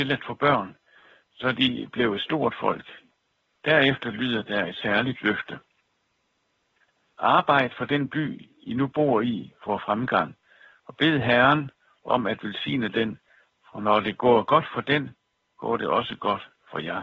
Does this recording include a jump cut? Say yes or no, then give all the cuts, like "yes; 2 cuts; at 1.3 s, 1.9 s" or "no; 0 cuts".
no; 0 cuts